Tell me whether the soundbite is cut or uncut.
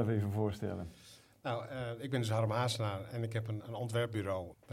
cut